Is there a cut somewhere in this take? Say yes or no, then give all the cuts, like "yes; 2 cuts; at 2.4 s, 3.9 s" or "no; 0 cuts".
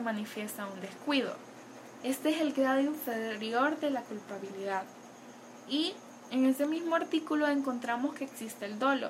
yes; 1 cut; at 2.0 s